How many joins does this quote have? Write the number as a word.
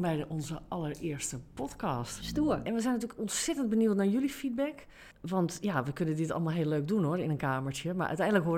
one